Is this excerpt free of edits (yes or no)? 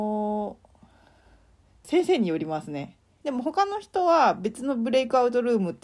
no